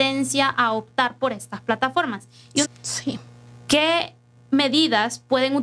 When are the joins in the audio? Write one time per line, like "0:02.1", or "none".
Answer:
0:02.6